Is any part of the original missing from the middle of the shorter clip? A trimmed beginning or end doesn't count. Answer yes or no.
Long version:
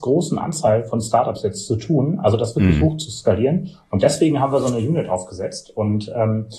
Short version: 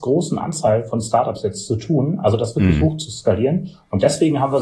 no